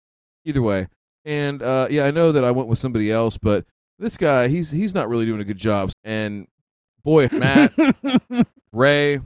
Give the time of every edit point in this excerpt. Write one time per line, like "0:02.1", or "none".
0:05.9
0:07.3